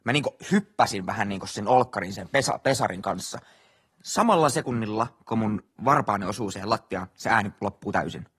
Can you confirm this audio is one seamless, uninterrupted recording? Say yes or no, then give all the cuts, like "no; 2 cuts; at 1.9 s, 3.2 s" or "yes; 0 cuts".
yes; 0 cuts